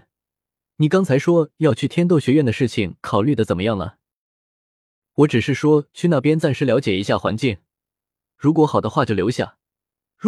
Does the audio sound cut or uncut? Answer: uncut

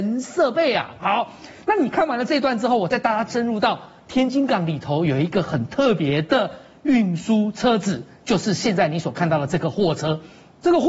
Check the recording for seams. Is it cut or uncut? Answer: uncut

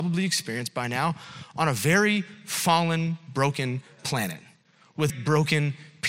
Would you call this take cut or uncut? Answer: cut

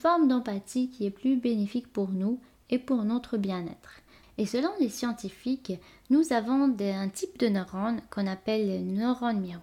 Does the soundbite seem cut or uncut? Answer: cut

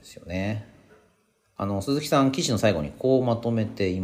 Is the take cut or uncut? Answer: uncut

